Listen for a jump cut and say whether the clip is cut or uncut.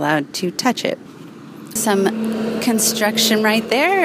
cut